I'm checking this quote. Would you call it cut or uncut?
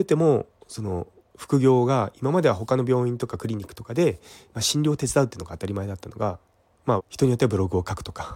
cut